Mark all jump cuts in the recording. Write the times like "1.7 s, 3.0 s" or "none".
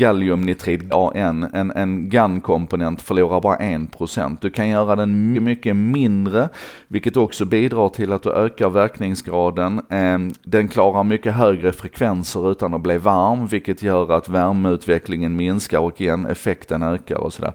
0.9 s, 5.3 s